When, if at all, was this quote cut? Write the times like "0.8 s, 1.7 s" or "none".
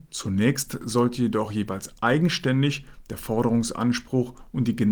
none